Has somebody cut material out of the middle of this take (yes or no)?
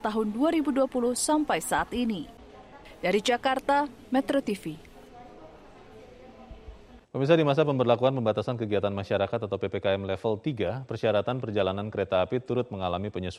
yes